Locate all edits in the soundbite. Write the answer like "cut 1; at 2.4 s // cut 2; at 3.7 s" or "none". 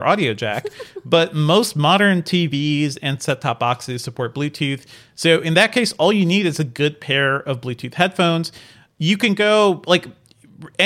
none